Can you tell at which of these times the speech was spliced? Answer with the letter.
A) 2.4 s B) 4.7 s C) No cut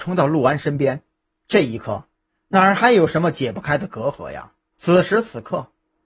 B